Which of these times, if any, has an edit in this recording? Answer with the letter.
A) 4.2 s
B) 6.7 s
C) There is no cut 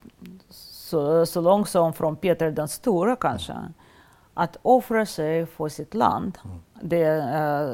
B